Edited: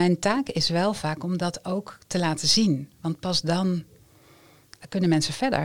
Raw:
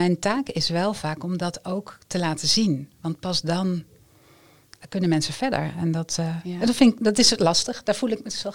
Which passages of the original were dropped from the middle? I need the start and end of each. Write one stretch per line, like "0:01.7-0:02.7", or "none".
none